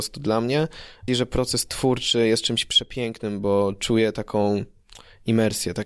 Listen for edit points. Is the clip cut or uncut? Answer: cut